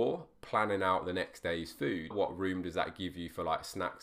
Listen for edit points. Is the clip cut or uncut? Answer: cut